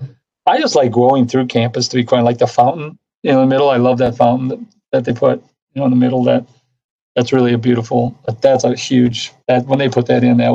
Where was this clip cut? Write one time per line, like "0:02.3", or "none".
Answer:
none